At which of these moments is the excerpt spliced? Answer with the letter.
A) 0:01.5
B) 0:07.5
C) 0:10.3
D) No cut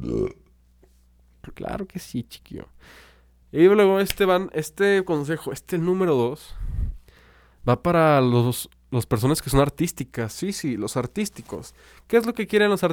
A